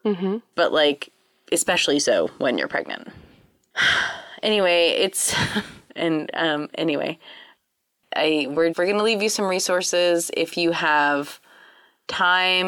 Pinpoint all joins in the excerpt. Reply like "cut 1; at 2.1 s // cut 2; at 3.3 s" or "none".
cut 1; at 5.9 s // cut 2; at 8.7 s